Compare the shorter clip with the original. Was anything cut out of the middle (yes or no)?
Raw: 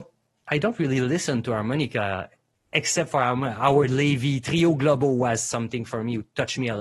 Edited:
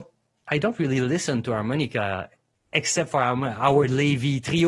no